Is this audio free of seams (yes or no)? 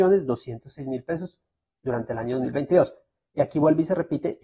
yes